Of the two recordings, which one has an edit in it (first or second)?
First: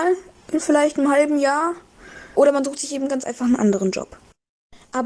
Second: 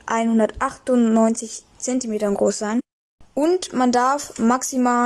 first